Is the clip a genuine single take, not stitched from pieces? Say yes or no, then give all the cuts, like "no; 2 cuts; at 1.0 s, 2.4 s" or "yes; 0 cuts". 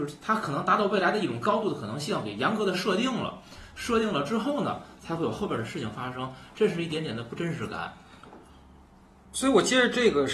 yes; 0 cuts